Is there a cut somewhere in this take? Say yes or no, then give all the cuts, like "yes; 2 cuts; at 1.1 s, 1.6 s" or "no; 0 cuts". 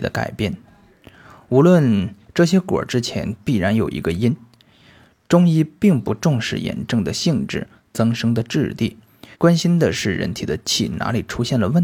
yes; 2 cuts; at 2.3 s, 9.3 s